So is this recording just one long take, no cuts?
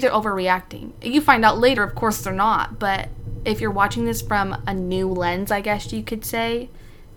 yes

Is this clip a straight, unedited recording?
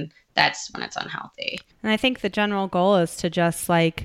no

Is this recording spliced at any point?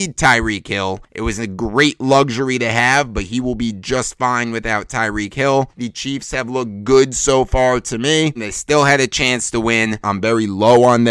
yes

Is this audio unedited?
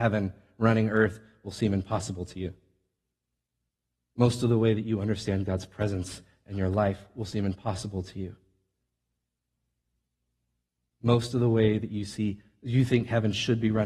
yes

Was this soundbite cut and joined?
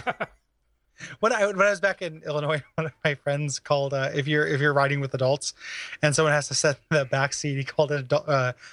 no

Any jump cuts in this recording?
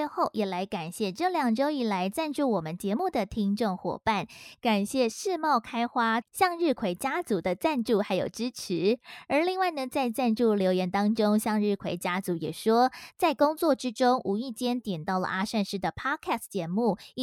yes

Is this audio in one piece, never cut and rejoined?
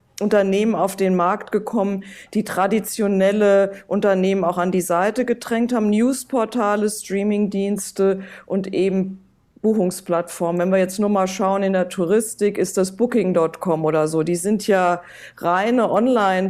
yes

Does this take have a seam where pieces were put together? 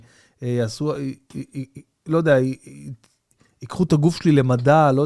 no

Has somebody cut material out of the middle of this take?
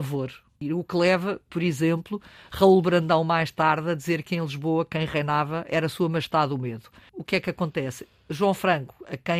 no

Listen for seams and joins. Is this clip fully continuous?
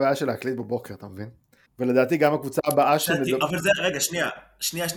no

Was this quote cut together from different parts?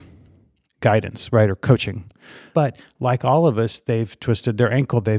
yes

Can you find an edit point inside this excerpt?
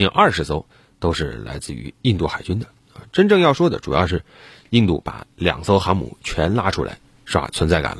no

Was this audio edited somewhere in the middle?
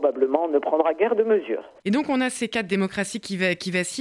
yes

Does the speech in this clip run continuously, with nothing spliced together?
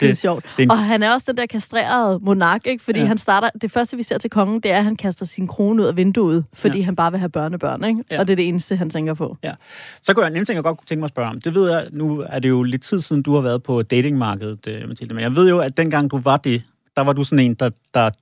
yes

